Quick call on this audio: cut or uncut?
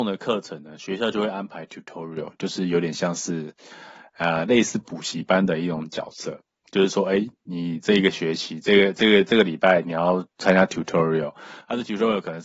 uncut